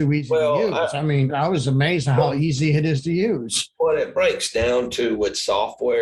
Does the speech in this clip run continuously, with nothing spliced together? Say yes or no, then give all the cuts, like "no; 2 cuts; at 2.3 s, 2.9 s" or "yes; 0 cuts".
no; 1 cut; at 1.3 s